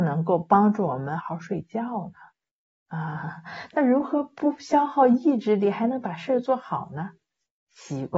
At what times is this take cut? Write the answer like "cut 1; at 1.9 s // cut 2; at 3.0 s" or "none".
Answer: cut 1; at 1.2 s